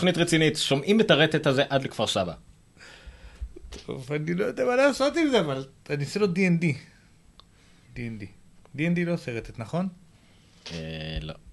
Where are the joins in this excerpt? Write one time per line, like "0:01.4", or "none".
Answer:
none